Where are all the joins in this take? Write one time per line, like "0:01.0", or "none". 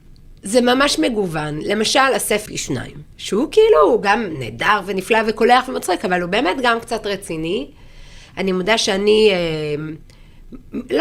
0:02.5